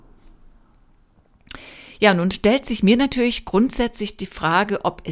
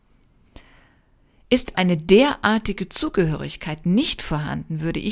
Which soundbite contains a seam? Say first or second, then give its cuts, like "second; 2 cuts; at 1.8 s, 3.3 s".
second; 1 cut; at 1.7 s